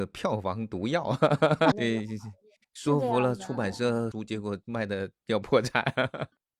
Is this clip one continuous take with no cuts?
no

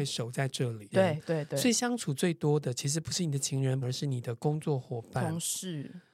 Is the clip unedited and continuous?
no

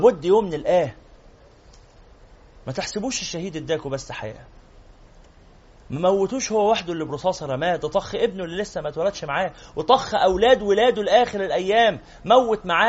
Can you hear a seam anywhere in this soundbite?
no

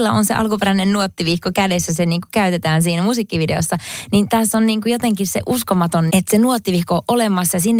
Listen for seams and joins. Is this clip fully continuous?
no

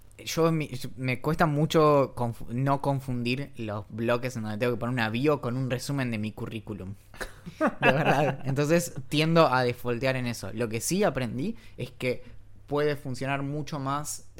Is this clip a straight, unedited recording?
yes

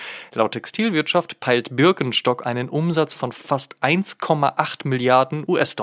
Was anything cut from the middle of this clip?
no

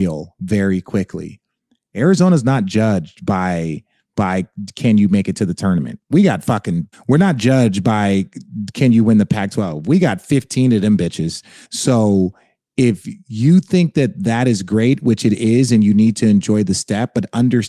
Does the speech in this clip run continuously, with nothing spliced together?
no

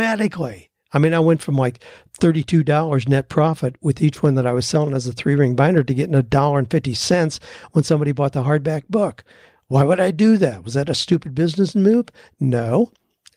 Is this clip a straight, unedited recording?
yes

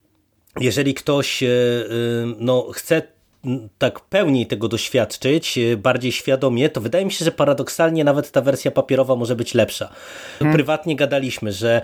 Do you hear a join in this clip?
yes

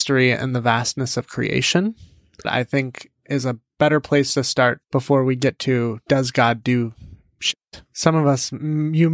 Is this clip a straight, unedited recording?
no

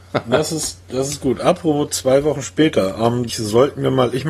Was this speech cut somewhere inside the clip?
yes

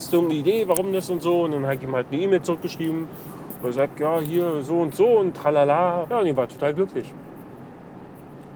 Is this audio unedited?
no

